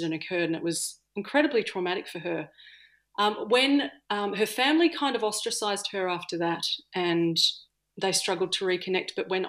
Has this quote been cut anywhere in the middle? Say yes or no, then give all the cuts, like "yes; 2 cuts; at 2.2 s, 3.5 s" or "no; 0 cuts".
no; 0 cuts